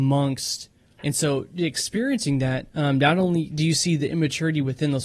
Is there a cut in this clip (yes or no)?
yes